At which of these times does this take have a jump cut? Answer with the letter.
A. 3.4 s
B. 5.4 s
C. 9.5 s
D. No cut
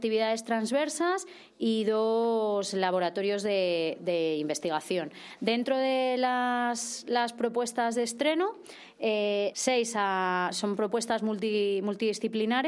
C